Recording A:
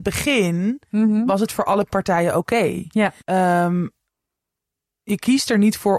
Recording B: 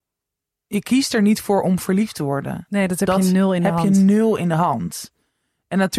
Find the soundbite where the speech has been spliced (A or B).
A